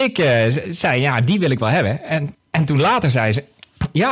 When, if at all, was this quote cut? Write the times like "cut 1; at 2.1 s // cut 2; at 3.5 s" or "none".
cut 1; at 2.3 s